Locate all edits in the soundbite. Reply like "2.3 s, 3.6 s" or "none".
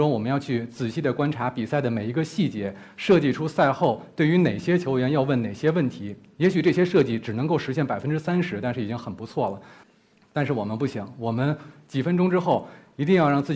10.1 s